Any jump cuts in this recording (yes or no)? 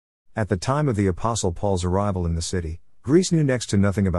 no